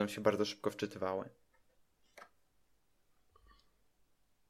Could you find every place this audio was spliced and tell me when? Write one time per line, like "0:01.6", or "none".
none